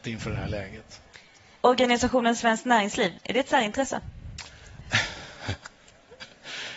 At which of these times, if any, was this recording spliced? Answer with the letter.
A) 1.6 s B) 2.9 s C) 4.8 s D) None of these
A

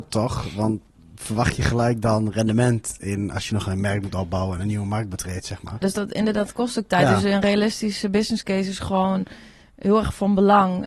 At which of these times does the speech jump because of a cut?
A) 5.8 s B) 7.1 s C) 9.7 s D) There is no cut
A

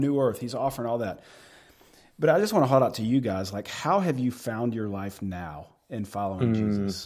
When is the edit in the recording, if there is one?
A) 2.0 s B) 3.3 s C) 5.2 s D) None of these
D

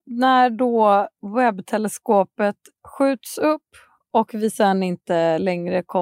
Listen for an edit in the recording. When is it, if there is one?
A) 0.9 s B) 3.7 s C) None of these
C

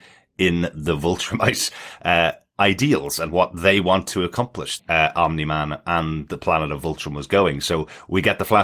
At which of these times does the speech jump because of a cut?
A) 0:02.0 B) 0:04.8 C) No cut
B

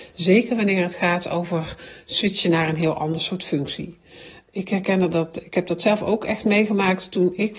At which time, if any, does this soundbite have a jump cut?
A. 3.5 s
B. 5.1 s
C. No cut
C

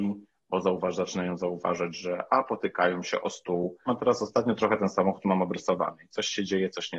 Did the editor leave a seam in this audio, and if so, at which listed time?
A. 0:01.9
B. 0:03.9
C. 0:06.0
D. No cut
B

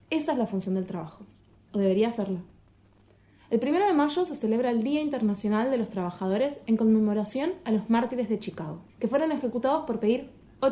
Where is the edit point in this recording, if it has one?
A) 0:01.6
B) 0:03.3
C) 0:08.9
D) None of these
C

